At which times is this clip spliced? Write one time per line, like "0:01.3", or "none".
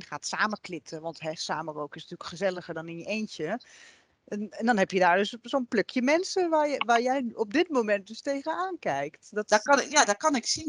none